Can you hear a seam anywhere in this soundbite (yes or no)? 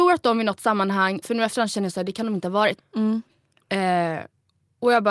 yes